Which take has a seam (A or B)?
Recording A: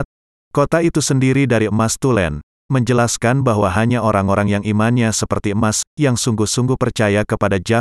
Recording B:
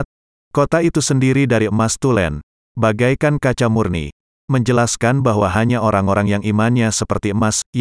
A